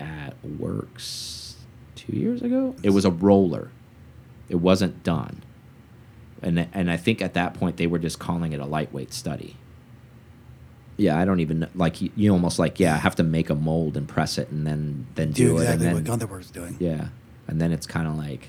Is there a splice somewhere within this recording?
yes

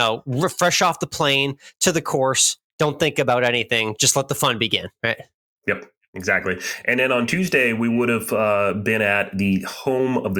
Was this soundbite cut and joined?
no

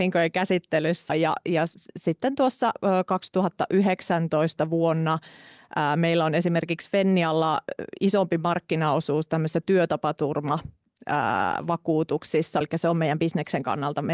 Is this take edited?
yes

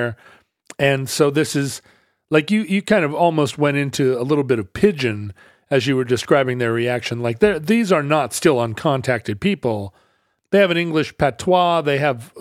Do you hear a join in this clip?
no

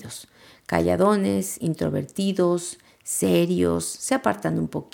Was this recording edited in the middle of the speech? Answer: no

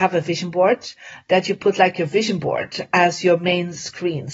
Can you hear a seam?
no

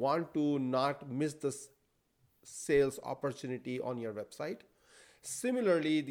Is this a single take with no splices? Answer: yes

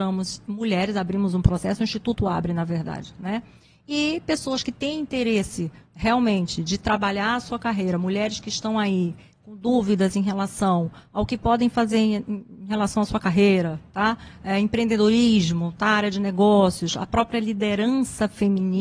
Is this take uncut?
yes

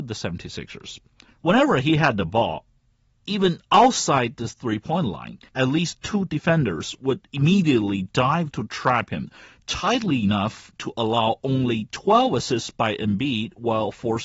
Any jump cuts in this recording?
yes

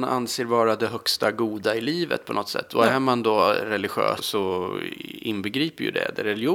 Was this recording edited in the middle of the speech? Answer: yes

